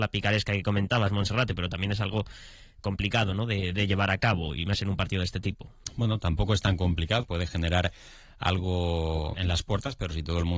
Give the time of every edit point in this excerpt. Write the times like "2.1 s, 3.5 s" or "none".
7.2 s, 9.3 s